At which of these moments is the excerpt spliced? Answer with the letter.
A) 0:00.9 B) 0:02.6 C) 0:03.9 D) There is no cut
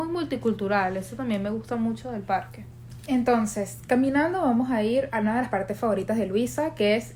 D